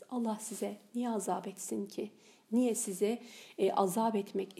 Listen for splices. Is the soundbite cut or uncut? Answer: uncut